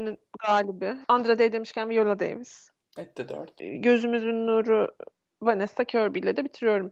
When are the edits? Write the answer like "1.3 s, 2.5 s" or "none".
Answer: 1.0 s